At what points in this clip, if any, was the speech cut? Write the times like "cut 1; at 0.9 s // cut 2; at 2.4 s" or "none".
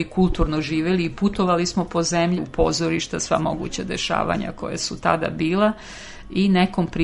cut 1; at 2.4 s

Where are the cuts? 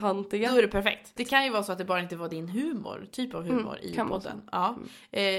cut 1; at 1.2 s

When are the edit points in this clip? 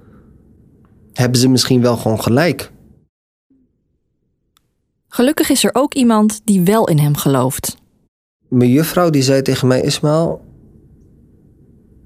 none

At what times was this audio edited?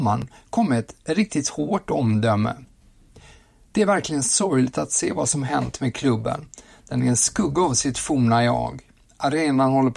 none

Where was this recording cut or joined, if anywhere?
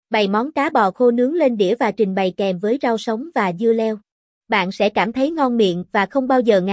cut 1; at 4.4 s

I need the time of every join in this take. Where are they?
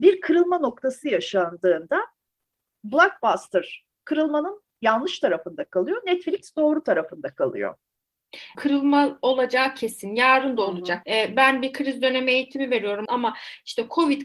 cut 1; at 8.5 s // cut 2; at 11.0 s // cut 3; at 13.1 s

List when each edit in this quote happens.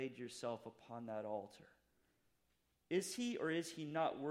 cut 1; at 2.7 s

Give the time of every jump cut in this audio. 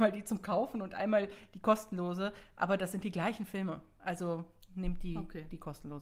none

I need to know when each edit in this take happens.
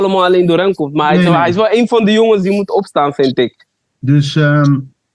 cut 1; at 3.8 s

